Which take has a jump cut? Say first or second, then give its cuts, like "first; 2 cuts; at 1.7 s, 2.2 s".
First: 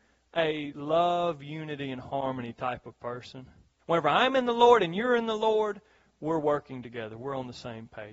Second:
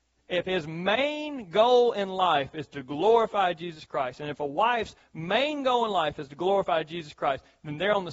first; 1 cut; at 3.8 s